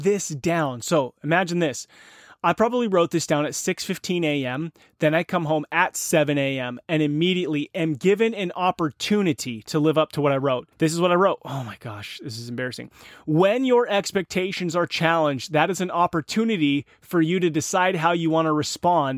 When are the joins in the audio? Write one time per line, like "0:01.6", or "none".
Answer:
0:10.7